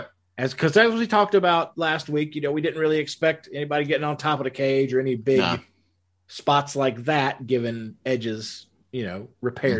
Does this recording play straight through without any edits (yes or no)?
yes